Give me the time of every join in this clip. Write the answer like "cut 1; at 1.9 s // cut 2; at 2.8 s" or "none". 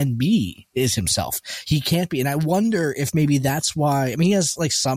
none